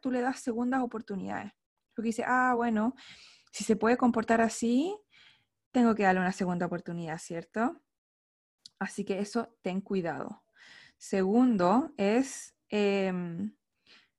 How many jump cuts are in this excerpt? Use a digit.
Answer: 0